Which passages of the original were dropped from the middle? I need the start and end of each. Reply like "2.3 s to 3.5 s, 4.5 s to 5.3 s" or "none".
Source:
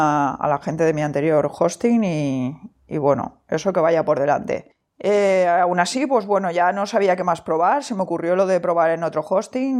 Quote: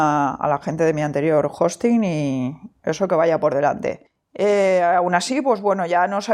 2.8 s to 3.4 s